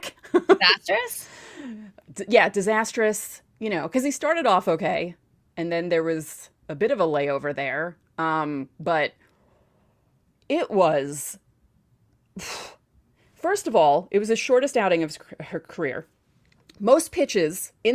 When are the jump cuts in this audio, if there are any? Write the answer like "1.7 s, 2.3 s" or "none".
none